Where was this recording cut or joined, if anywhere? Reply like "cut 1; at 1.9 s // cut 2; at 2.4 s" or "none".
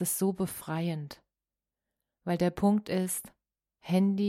none